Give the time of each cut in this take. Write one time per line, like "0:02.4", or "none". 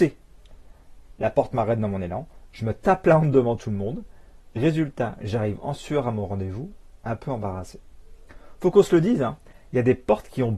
none